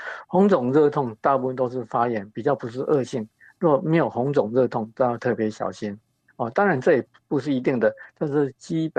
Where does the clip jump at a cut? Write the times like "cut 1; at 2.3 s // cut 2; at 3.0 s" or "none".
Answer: none